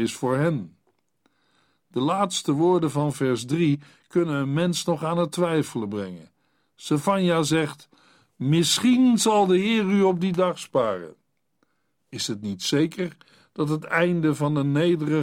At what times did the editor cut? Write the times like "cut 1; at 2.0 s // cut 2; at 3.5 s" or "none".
none